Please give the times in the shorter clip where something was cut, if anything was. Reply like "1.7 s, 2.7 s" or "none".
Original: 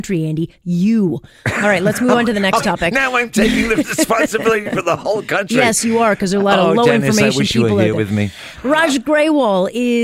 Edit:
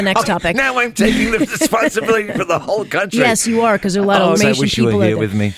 4.3 s